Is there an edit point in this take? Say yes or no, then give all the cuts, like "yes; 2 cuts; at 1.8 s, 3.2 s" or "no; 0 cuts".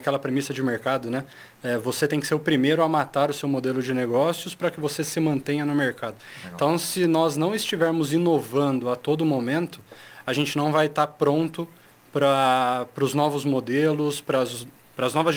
no; 0 cuts